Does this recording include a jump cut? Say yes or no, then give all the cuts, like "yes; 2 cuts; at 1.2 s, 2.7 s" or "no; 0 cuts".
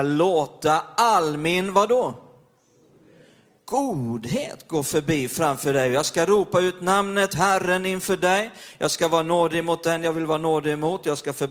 no; 0 cuts